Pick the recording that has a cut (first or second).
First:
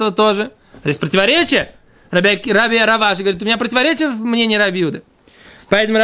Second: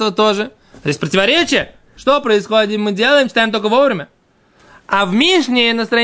second